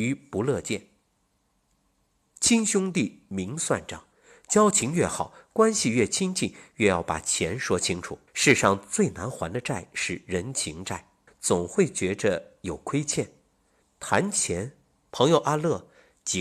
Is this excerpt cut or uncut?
cut